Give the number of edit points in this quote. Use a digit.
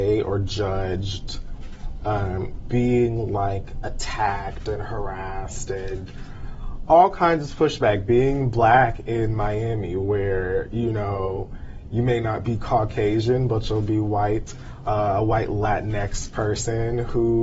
1